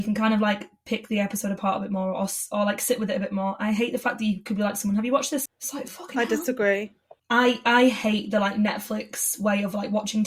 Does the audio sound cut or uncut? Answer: cut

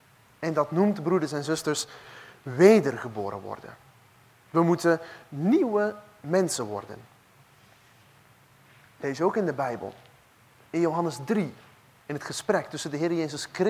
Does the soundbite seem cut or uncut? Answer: uncut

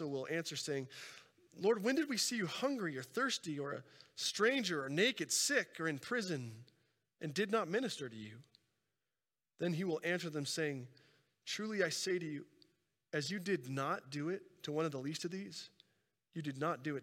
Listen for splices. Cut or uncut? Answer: uncut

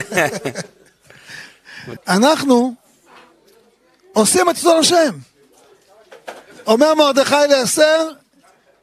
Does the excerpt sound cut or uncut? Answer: cut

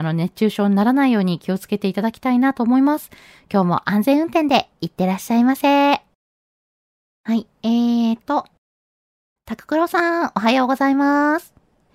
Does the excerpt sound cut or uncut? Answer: uncut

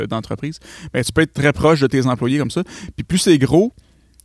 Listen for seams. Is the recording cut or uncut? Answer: uncut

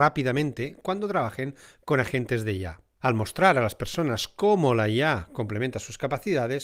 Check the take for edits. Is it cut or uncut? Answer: cut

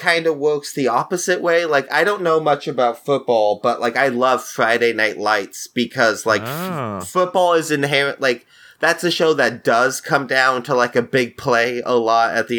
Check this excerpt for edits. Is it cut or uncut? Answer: uncut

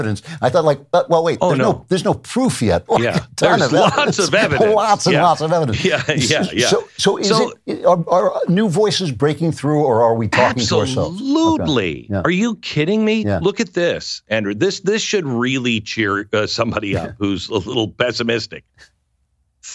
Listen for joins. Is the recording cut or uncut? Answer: cut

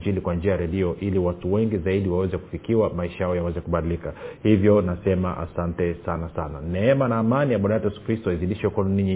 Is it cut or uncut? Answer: uncut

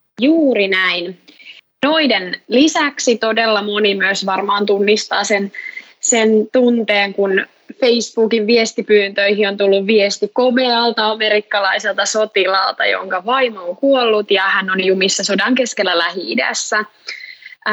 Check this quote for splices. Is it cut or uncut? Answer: uncut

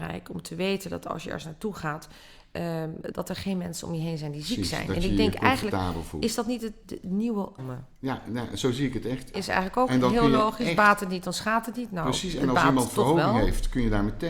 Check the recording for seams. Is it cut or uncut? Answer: cut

